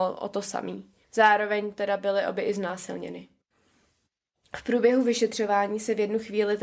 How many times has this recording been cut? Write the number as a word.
one